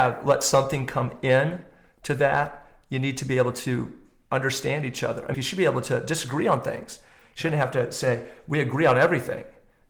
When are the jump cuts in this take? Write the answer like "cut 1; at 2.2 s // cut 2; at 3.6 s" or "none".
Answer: cut 1; at 5.3 s